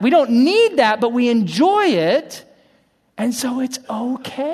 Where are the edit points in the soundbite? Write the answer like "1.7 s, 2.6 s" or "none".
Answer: none

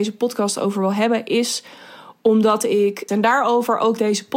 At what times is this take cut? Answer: 3.1 s

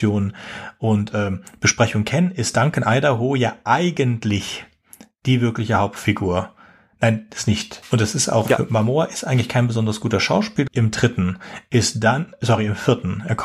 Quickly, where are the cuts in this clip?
7.8 s, 10.7 s

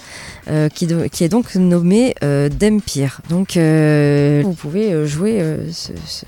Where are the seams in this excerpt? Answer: 3.2 s, 4.4 s

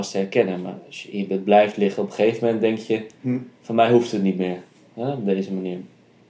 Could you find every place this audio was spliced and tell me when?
none

